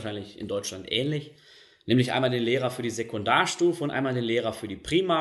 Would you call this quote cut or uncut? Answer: uncut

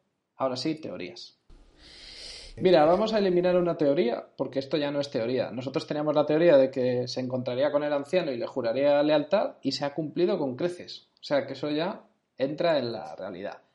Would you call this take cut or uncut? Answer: cut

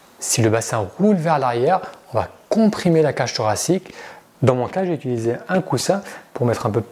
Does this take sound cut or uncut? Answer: cut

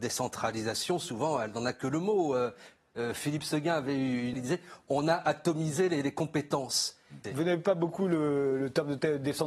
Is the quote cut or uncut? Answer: cut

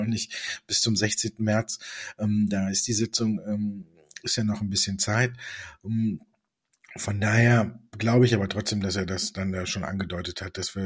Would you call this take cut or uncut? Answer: uncut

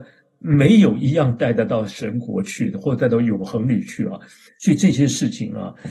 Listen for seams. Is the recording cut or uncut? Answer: cut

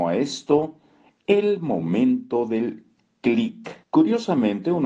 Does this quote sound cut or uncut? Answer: cut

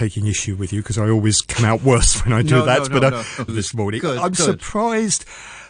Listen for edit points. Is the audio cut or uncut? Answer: cut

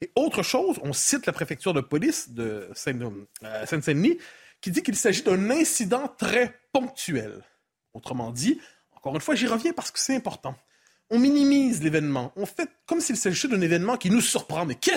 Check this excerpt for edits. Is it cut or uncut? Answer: uncut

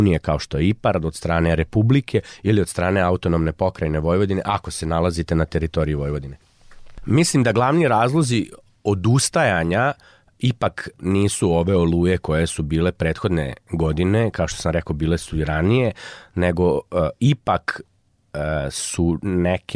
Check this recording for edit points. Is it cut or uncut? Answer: uncut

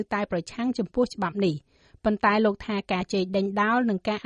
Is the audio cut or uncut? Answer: cut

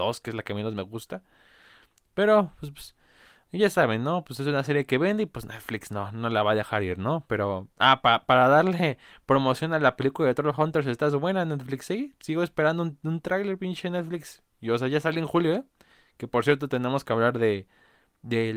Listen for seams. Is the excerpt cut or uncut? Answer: uncut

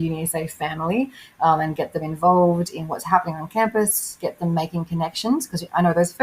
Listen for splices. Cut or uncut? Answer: uncut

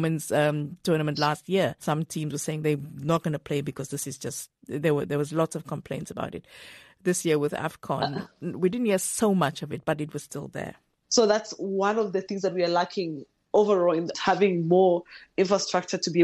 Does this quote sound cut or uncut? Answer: cut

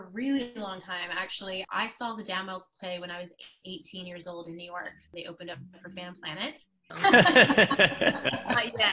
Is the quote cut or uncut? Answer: cut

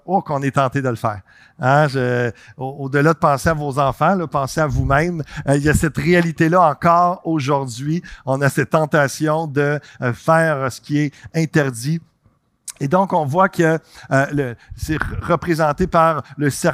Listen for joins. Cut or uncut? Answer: uncut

